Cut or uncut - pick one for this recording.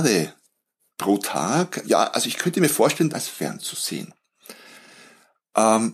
cut